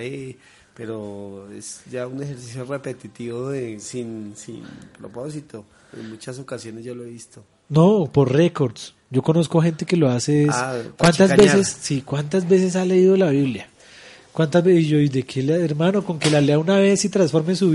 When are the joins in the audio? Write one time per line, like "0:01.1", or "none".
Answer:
none